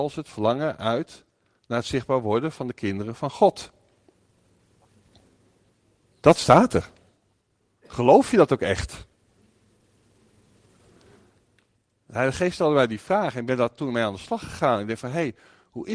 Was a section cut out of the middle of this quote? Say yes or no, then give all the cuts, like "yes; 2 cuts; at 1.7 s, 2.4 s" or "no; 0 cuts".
no; 0 cuts